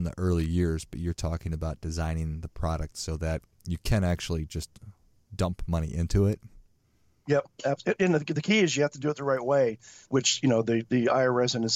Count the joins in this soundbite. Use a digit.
1